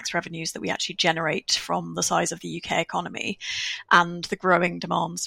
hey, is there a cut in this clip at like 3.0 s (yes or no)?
no